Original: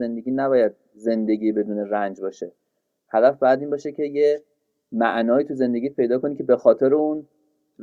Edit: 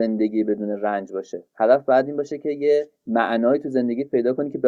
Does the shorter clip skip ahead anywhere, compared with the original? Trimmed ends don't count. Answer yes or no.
yes